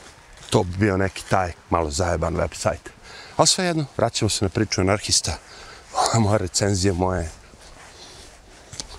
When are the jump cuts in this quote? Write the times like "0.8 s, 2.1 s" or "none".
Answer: 1.5 s